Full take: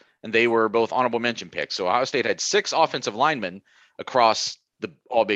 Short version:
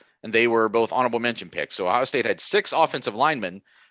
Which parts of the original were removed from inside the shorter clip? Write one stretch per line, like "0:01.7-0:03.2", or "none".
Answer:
none